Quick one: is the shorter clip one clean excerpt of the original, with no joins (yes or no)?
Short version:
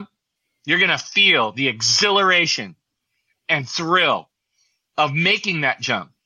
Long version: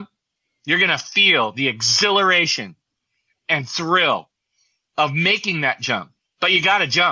yes